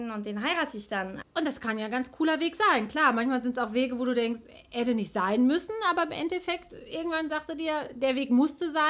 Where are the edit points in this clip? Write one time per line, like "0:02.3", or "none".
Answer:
0:01.2